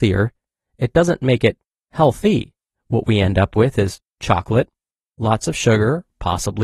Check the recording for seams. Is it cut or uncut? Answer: cut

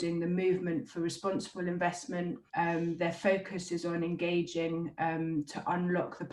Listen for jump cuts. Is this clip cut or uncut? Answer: cut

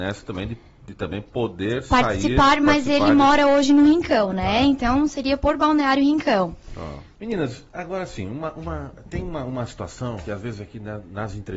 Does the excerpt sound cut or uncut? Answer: cut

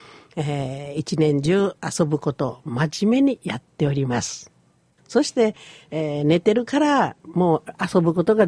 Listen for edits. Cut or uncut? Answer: cut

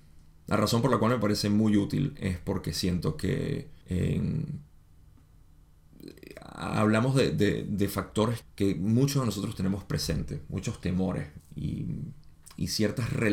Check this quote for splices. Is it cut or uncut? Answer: cut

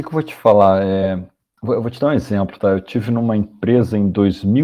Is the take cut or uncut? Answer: uncut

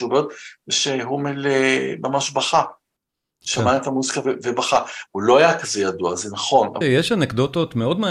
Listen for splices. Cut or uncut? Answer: cut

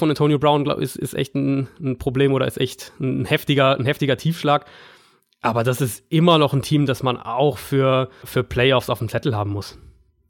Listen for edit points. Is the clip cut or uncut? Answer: cut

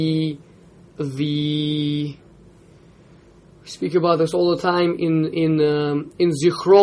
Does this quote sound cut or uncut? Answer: cut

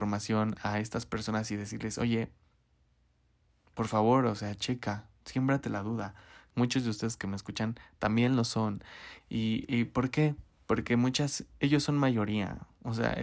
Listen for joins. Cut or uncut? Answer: cut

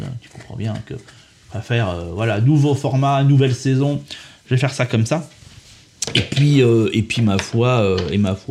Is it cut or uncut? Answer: uncut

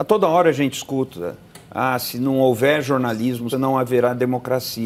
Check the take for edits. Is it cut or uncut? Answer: cut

